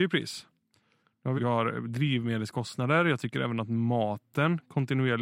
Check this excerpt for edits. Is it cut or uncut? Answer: cut